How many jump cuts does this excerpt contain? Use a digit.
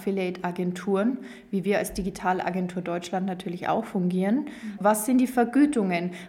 1